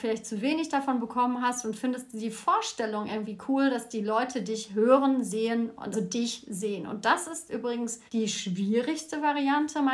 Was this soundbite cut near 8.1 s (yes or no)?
yes